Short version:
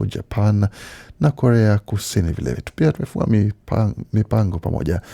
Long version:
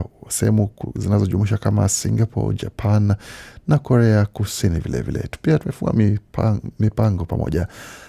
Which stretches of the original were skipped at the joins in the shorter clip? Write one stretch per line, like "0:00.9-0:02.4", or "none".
0:05.0-0:05.2